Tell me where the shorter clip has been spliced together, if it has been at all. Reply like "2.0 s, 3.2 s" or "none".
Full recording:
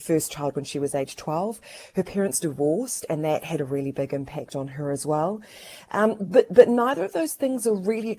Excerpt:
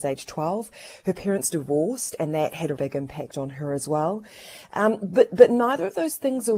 2.8 s